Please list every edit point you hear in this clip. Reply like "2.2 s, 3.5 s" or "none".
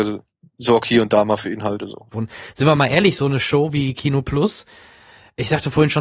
2.1 s